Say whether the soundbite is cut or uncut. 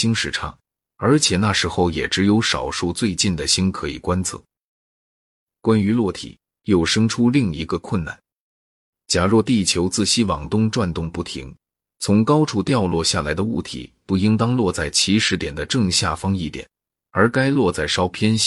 uncut